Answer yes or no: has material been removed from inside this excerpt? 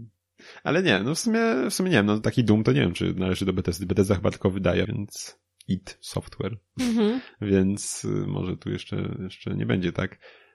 yes